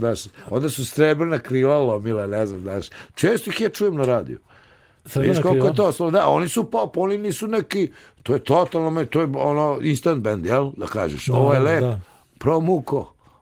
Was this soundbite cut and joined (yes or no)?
no